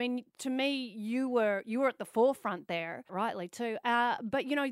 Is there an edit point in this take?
yes; 1 cut; at 3.1 s

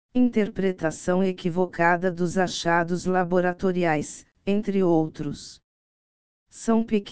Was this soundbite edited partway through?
no; 0 cuts

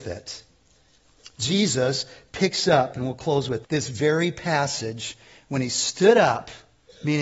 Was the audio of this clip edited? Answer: yes; 1 cut; at 3.6 s

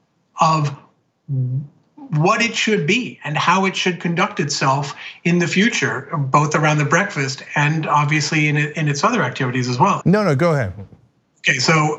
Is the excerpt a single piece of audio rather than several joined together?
no; 1 cut; at 10.0 s

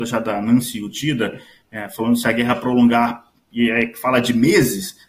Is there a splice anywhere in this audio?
no; 0 cuts

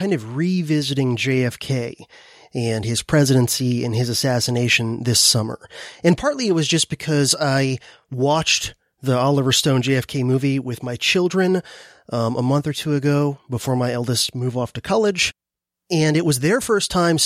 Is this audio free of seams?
yes; 0 cuts

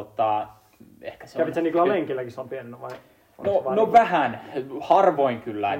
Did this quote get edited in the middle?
no; 0 cuts

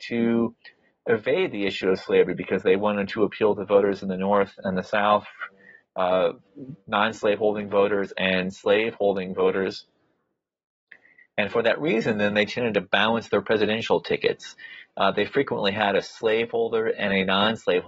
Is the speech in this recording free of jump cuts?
yes; 0 cuts

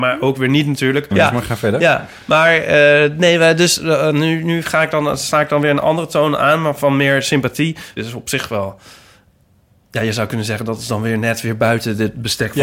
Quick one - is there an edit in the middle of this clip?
yes; 2 cuts; at 1.1 s, 8.0 s

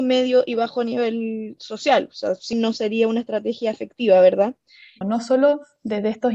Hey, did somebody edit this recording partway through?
yes; 2 cuts; at 2.5 s, 5.0 s

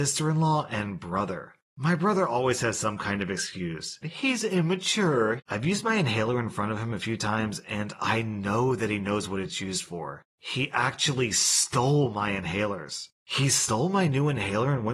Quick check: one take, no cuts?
no; 2 cuts; at 4.0 s, 5.4 s

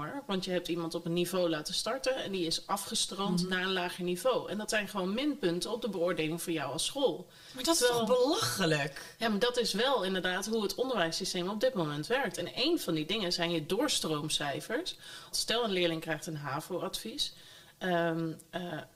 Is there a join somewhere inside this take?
yes; 2 cuts; at 12.3 s, 15.3 s

